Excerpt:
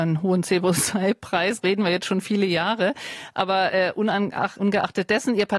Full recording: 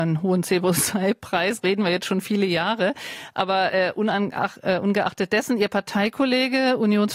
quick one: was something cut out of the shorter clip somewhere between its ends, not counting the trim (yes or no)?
yes